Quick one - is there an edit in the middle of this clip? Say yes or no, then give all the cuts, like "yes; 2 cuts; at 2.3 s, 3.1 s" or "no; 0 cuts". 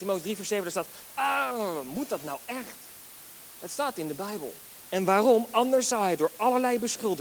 yes; 1 cut; at 1.1 s